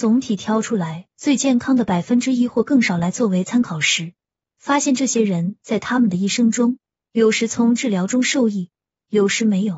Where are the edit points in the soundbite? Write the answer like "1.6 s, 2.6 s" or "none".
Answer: none